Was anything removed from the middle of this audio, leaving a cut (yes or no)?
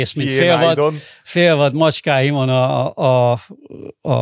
no